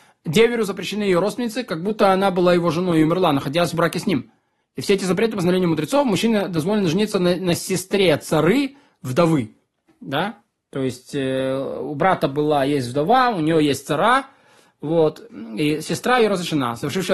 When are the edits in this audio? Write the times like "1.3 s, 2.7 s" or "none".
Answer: none